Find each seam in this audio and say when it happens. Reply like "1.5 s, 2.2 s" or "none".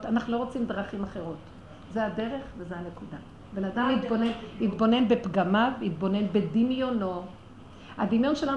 none